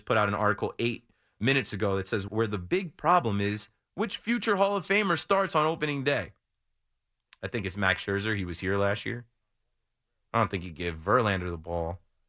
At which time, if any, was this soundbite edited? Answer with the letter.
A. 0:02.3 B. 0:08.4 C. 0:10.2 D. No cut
A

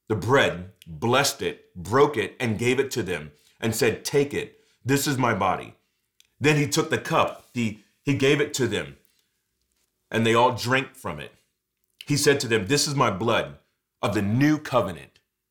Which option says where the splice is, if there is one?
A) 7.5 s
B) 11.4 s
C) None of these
A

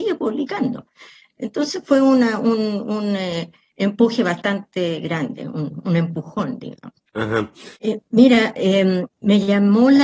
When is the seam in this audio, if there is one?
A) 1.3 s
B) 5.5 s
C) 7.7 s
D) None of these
C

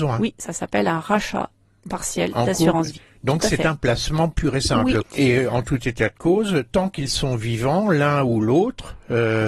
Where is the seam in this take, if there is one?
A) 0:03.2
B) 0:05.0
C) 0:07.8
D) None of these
B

